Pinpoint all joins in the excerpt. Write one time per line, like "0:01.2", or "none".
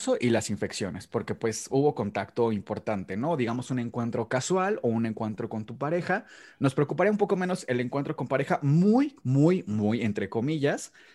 none

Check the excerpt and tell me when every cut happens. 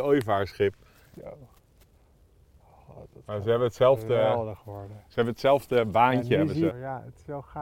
0:01.1
0:06.7

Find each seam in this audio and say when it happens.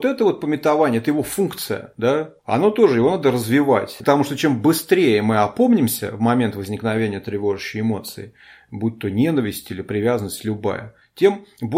none

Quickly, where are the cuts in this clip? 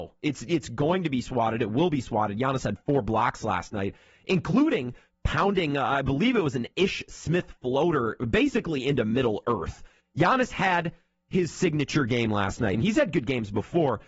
0:10.0
0:12.7

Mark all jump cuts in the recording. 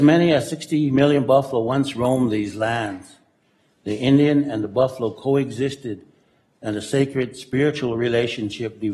none

